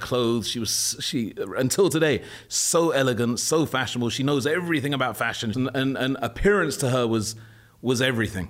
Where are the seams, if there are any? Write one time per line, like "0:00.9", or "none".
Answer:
0:05.5